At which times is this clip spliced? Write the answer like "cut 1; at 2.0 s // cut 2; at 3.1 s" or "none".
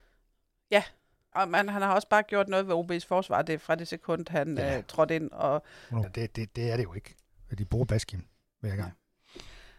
cut 1; at 1.3 s // cut 2; at 6.0 s